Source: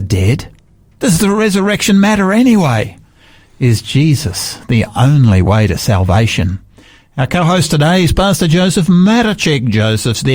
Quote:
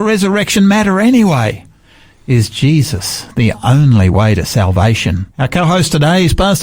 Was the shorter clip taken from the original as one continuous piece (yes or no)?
no